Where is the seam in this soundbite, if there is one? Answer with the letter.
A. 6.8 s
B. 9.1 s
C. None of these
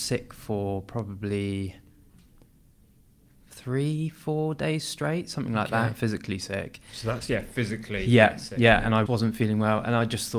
B